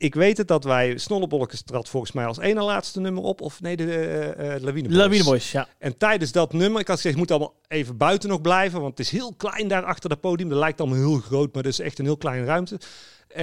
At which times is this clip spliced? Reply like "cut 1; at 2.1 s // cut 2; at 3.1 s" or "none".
none